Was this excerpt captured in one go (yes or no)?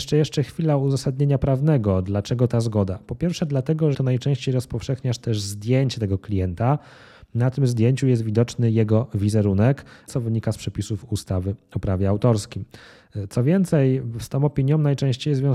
no